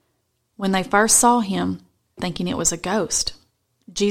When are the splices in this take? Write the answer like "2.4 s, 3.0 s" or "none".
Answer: 2.2 s